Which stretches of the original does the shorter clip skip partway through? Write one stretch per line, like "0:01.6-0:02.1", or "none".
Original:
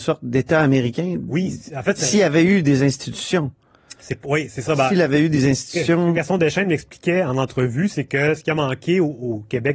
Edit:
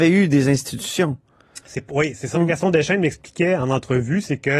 0:04.7-0:06.0